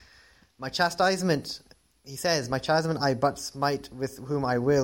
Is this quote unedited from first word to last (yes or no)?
yes